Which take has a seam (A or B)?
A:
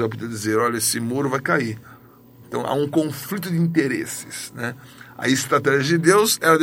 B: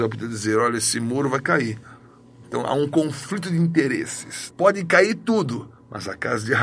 B